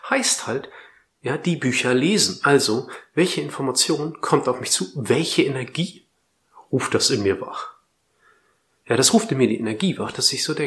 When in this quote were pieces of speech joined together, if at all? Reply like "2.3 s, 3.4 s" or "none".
none

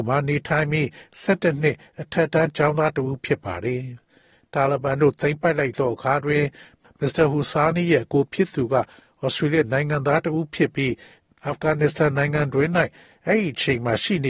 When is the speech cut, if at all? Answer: none

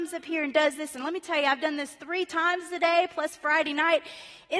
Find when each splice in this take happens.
none

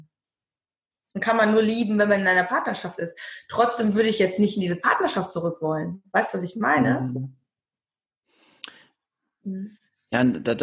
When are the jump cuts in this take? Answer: none

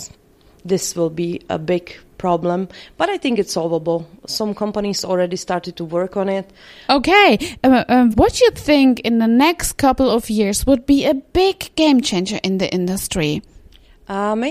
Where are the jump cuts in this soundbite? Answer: 6.9 s, 8.1 s

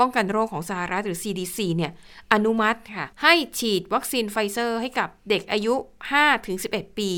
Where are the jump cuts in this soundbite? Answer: 3.1 s

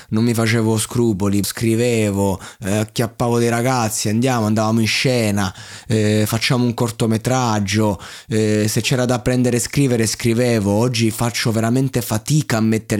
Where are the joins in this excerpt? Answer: 1.4 s

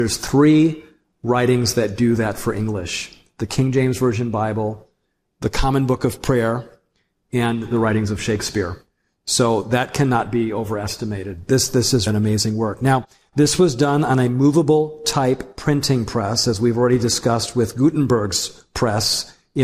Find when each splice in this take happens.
12.1 s

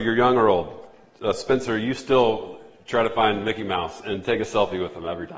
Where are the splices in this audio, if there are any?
none

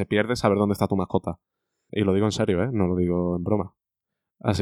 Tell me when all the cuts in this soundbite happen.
none

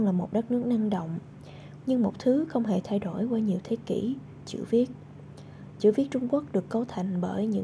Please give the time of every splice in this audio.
1.8 s

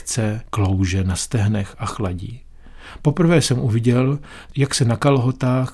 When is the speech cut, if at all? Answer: none

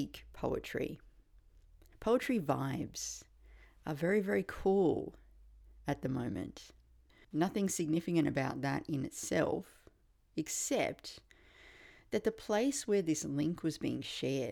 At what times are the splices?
1.9 s, 7.2 s

